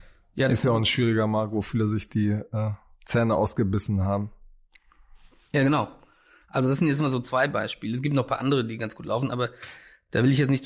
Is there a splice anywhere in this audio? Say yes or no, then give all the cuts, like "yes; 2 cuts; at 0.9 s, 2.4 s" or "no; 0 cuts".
no; 0 cuts